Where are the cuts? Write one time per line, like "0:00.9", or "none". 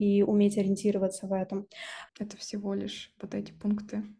0:02.1